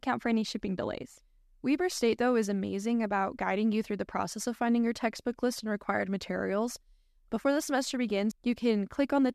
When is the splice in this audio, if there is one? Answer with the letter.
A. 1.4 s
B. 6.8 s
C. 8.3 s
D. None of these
C